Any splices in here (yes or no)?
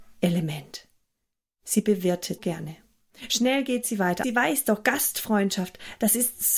yes